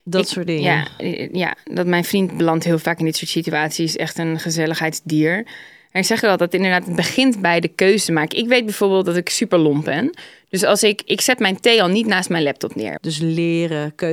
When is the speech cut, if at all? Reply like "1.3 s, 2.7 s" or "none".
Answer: 13.0 s